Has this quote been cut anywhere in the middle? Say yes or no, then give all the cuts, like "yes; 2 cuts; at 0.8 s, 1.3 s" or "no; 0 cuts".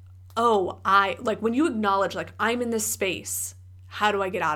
no; 0 cuts